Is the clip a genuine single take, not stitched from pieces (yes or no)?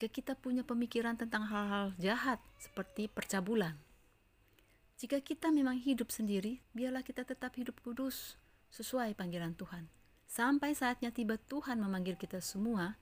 no